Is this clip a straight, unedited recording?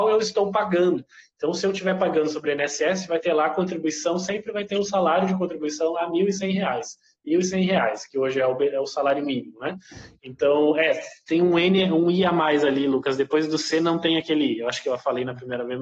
yes; 0 cuts

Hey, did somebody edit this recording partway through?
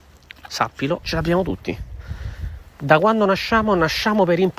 yes; 1 cut; at 1.0 s

